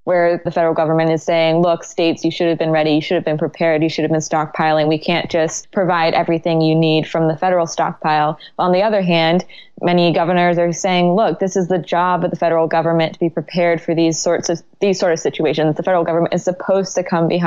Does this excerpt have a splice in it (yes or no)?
no